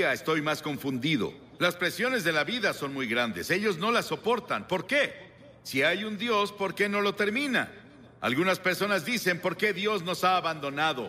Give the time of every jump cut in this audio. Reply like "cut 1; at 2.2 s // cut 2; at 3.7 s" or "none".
cut 1; at 1.6 s